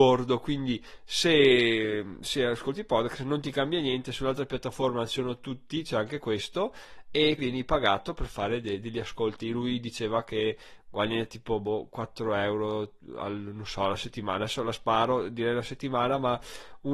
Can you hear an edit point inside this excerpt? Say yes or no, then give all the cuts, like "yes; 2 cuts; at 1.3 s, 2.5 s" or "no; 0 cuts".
yes; 1 cut; at 7.4 s